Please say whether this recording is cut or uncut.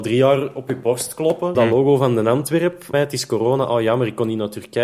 cut